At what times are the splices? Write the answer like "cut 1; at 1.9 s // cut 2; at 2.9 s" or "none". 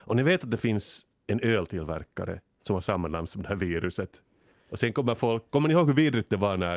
cut 1; at 4.5 s